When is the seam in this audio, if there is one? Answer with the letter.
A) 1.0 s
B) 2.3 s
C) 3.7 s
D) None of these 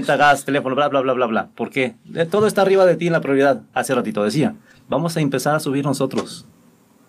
C